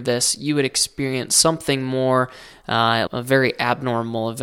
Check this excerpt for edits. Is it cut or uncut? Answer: cut